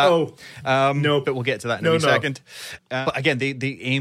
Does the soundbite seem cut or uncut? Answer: cut